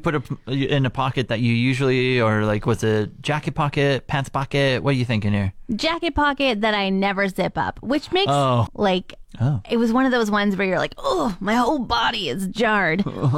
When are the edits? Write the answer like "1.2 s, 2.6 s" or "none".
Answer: 8.7 s

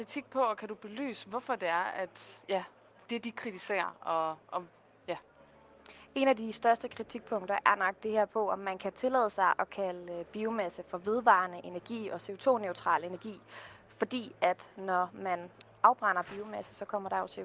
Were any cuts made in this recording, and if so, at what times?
none

